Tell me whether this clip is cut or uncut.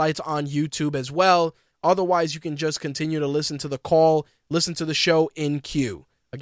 cut